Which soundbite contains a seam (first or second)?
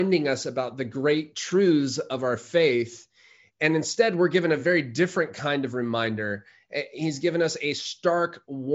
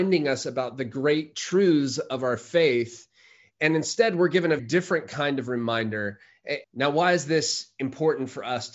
second